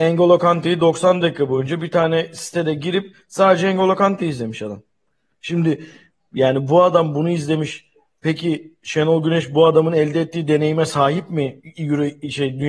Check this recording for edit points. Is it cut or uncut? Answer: uncut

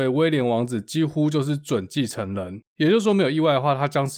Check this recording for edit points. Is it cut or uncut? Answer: uncut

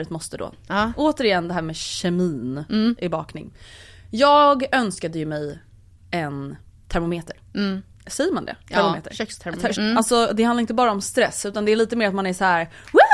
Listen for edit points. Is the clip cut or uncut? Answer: cut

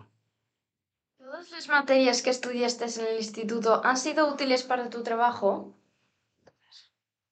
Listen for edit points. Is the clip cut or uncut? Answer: uncut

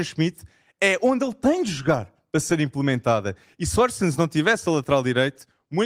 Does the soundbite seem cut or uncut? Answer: uncut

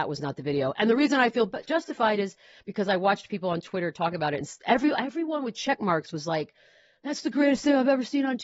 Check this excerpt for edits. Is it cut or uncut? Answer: uncut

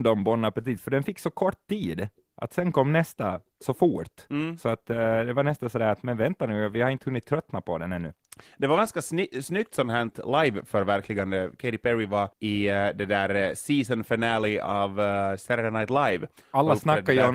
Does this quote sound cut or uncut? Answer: cut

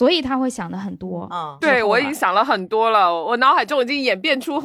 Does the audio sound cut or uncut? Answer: cut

